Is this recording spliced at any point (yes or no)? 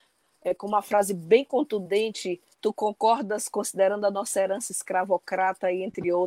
yes